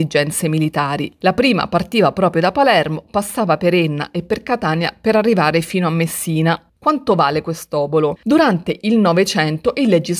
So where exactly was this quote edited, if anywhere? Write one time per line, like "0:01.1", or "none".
0:06.7
0:08.2